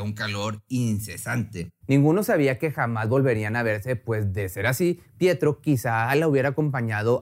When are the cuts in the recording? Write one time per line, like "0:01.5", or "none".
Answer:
0:01.8